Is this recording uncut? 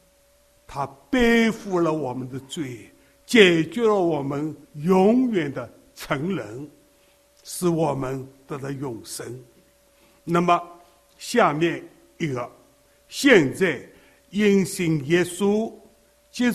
no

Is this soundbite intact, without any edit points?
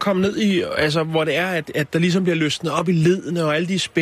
yes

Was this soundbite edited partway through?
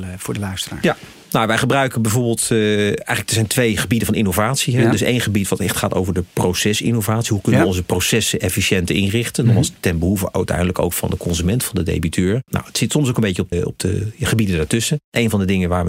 yes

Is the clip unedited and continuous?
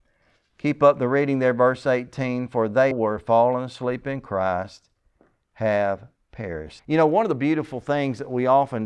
no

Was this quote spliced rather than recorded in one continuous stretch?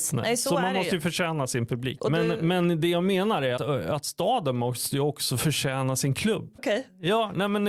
yes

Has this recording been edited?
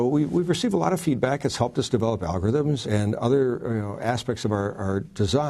yes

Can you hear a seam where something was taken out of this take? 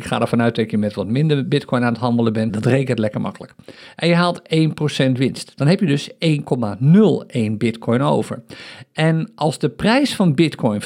yes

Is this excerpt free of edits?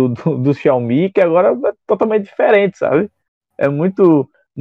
yes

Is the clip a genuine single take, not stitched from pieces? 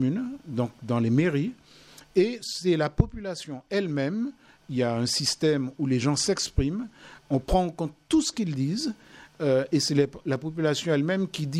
yes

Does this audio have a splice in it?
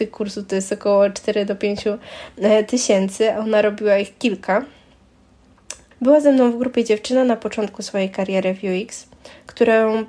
yes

